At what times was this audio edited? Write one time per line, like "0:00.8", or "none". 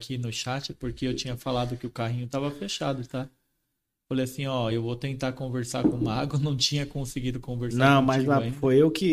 none